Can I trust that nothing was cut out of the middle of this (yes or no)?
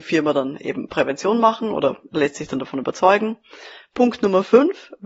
yes